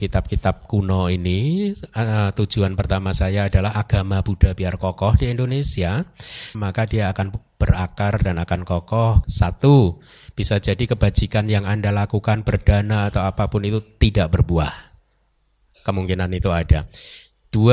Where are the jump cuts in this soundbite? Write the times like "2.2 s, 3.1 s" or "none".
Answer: 6.5 s, 9.2 s